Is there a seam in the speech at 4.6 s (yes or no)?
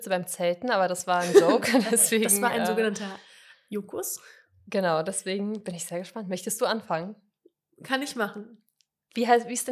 no